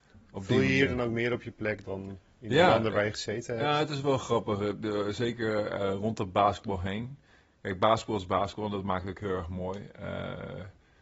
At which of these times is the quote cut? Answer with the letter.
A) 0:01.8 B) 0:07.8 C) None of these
A